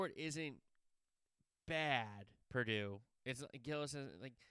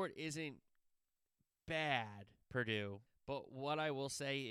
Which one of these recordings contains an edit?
second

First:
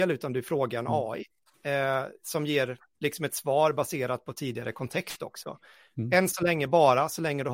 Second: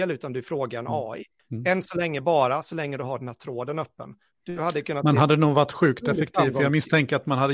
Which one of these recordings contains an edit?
second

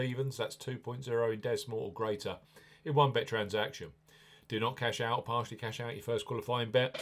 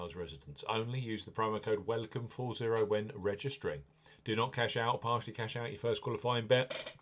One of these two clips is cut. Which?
second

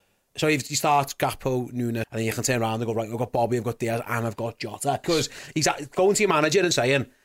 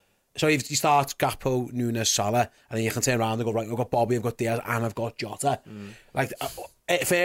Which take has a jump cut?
first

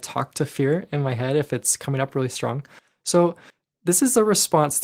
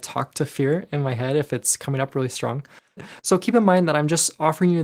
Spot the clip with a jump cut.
second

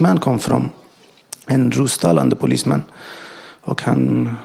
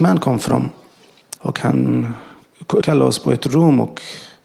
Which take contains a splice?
second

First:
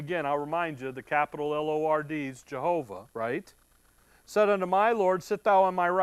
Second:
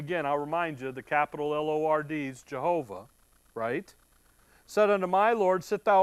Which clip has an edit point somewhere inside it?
first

